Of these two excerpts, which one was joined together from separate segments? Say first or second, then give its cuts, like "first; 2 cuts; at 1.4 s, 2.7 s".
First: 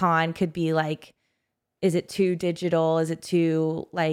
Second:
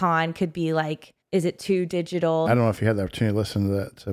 second; 2 cuts; at 1.2 s, 2.5 s